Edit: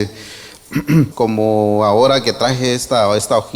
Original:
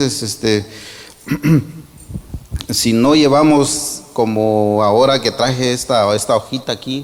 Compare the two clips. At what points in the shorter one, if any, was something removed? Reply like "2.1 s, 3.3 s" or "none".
1.1 s